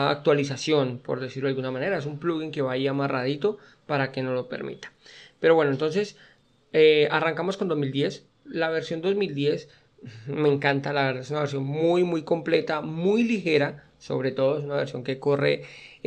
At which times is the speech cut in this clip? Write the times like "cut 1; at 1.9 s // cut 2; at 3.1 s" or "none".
none